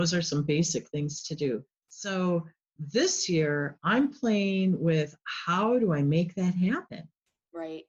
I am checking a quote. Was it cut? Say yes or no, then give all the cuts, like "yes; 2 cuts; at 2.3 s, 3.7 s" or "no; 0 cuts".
yes; 1 cut; at 1.8 s